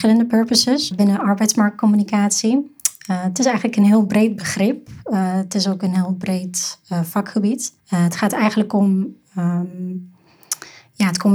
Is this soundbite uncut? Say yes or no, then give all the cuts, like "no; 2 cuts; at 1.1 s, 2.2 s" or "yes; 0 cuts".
no; 2 cuts; at 0.9 s, 7.8 s